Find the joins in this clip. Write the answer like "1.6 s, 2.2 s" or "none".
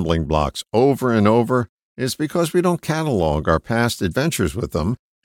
none